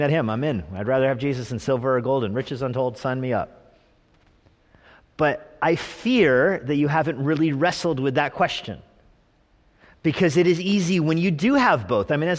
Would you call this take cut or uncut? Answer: uncut